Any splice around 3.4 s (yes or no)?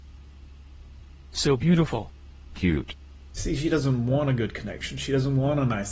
yes